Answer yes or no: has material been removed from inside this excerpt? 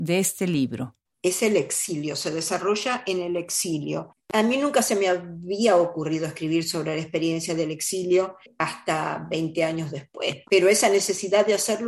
yes